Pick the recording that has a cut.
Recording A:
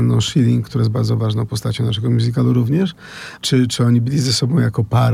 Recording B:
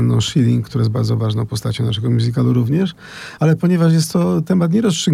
A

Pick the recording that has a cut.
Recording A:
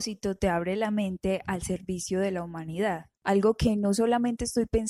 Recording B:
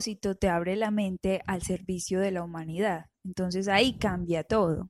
A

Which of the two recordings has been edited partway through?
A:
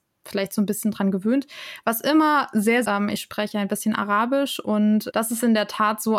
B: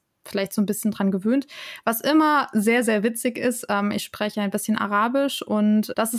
A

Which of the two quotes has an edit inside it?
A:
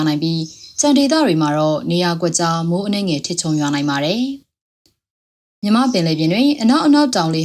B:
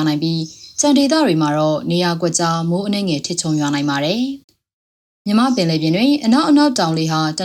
B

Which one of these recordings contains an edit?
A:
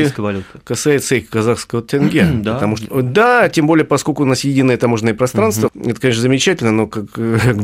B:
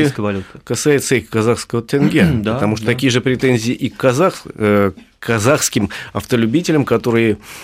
A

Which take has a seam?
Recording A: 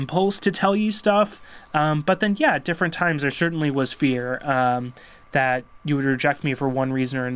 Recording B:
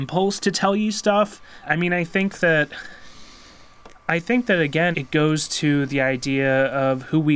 B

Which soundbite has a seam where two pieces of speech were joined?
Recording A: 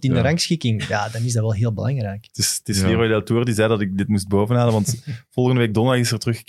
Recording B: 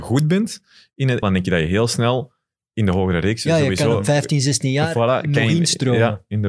B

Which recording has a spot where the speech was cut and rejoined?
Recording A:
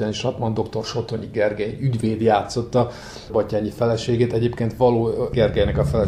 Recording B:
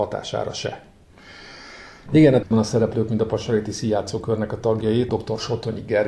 B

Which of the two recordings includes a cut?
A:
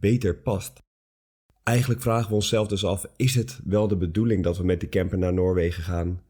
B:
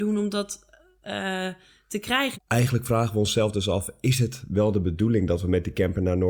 B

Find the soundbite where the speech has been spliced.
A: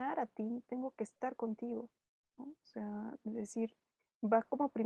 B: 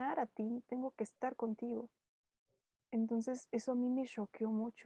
A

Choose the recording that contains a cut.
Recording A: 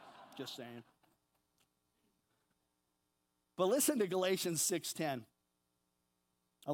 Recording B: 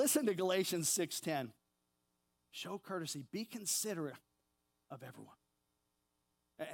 B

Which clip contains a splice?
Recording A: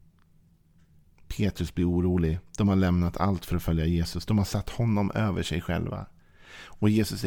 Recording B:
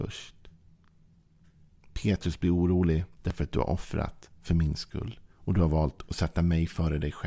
B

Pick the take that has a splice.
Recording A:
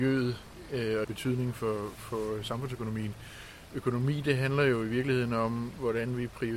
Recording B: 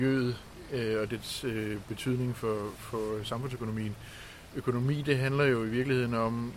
A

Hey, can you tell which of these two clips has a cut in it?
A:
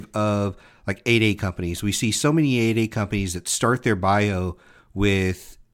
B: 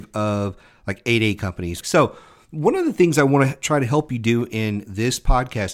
B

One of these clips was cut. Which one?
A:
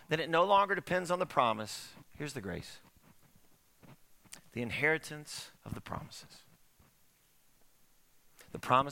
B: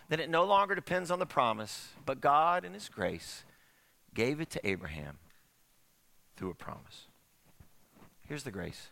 A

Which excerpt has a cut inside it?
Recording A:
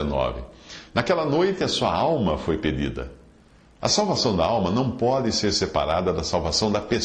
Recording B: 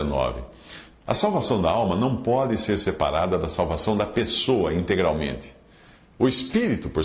B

